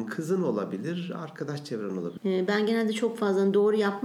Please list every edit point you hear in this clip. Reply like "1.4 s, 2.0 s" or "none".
2.2 s